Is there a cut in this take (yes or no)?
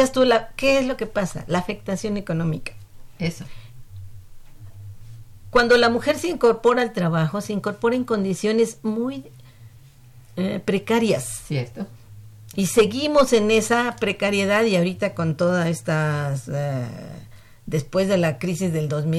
no